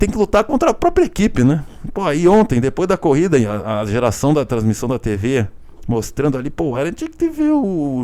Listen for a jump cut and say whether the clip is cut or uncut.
cut